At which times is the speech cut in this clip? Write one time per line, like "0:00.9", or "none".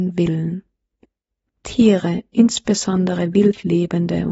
none